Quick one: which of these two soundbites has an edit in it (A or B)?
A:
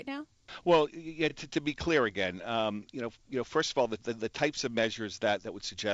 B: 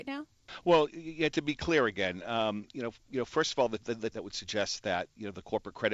B